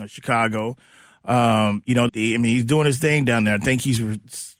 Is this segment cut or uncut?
cut